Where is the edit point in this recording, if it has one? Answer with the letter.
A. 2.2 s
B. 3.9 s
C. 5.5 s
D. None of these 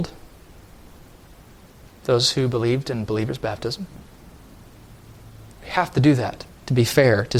C